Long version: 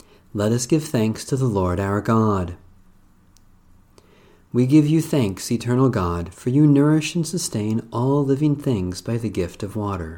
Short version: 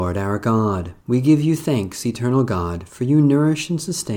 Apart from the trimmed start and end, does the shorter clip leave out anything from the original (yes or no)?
yes